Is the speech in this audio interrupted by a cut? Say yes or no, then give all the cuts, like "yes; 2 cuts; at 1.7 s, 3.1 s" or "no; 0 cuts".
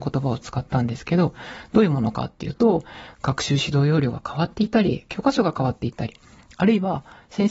no; 0 cuts